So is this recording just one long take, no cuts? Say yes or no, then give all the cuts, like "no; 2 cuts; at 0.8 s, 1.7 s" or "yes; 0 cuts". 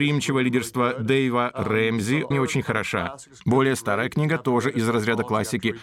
no; 1 cut; at 2.3 s